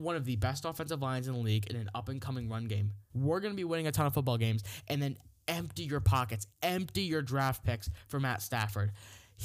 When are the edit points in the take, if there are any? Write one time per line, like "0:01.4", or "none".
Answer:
0:01.7
0:03.1

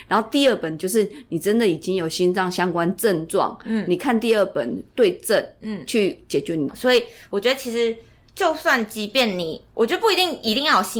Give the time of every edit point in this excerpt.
0:06.7

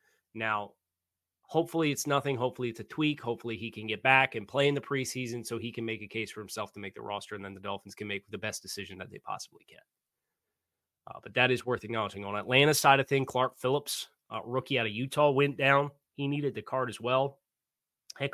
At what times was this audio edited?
none

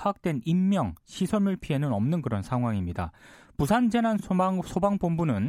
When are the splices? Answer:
none

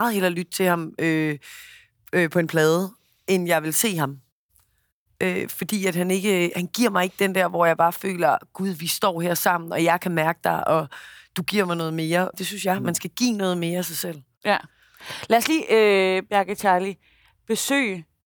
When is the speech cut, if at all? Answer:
0:12.3

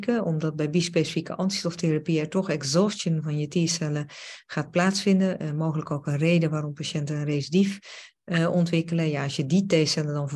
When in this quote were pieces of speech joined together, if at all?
none

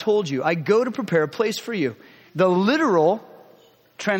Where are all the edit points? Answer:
0:02.3

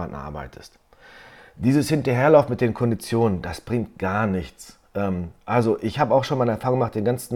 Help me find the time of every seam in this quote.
none

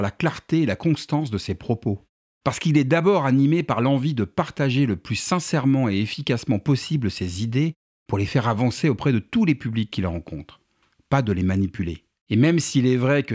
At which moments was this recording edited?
0:12.2

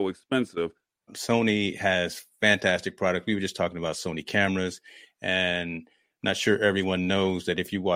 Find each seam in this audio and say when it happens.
0:01.1

